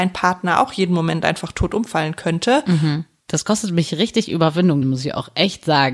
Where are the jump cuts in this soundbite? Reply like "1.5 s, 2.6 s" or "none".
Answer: 3.2 s, 4.8 s